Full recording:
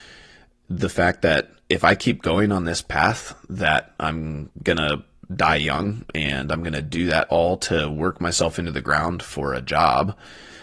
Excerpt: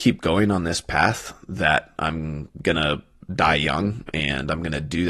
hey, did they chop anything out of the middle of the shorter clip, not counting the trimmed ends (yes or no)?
no